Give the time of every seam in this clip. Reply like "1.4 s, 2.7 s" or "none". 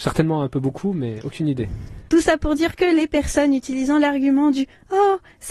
2.1 s